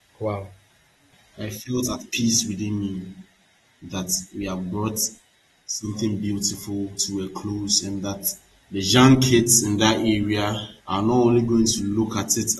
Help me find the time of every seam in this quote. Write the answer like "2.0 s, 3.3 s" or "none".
1.4 s, 10.8 s